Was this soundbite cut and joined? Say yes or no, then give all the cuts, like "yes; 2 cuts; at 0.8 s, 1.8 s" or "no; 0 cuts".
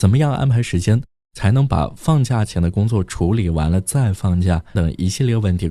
yes; 1 cut; at 4.8 s